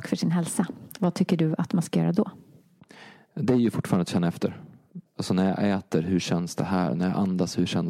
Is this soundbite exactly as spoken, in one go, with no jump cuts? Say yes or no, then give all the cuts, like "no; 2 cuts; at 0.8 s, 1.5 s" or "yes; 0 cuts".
no; 1 cut; at 5.0 s